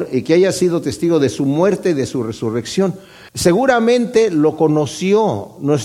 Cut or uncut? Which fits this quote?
cut